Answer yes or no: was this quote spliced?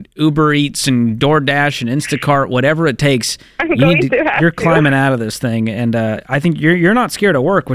no